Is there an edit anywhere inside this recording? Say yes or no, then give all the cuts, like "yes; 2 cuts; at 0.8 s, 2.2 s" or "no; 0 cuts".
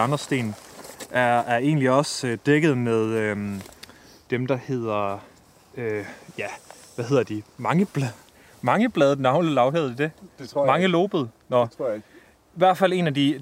no; 0 cuts